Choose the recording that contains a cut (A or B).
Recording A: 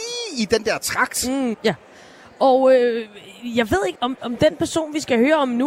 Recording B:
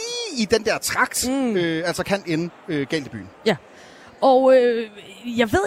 A